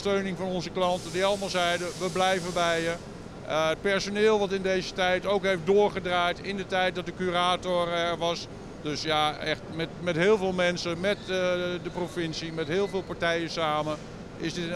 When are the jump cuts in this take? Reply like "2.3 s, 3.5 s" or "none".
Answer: 8.8 s, 9.9 s, 11.0 s